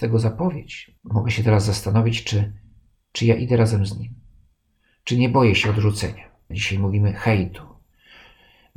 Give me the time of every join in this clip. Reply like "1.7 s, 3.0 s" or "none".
1.0 s, 6.5 s